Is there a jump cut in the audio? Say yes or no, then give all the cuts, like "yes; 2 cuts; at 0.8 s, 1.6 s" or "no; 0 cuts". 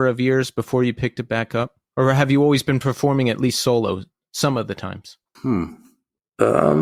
no; 0 cuts